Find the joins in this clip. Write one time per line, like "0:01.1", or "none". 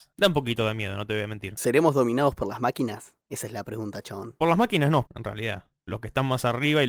0:05.1

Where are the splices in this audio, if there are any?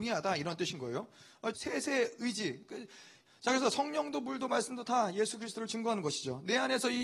0:01.5
0:03.3

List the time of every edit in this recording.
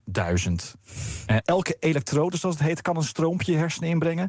0:01.4

